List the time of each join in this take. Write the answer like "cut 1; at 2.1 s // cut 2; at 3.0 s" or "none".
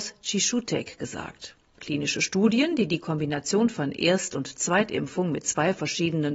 cut 1; at 1.8 s